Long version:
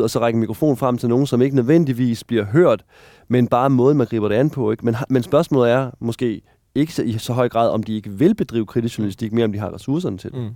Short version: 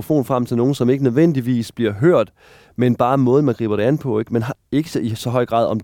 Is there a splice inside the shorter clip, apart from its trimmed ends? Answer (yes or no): yes